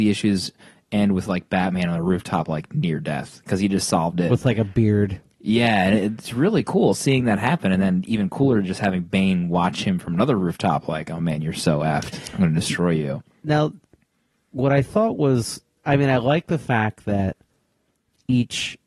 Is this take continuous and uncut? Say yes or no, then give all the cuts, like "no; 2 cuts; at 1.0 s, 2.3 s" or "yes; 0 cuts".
yes; 0 cuts